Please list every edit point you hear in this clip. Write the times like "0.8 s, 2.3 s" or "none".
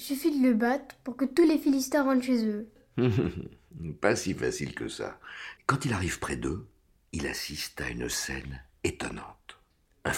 5.6 s